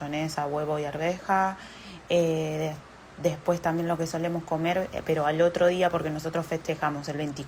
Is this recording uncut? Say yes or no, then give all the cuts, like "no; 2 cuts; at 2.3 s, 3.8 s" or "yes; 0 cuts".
yes; 0 cuts